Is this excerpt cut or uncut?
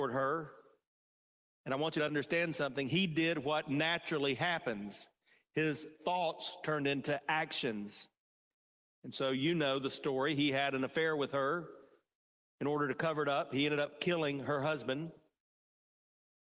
uncut